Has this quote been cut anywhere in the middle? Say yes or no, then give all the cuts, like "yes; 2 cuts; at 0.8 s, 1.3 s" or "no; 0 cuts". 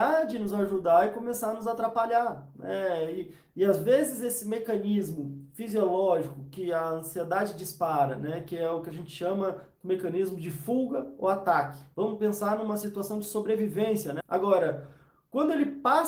yes; 2 cuts; at 11.9 s, 14.2 s